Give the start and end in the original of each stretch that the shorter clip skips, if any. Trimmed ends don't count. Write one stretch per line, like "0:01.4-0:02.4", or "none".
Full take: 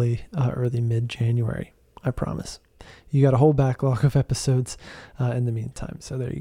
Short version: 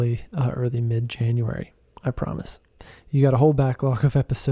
none